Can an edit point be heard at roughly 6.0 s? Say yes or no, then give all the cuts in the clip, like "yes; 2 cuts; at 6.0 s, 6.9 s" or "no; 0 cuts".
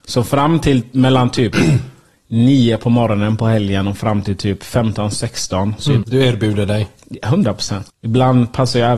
yes; 2 cuts; at 6.0 s, 7.9 s